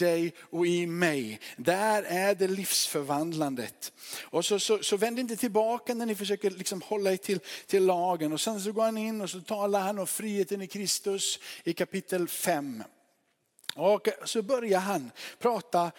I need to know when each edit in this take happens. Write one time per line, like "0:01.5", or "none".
none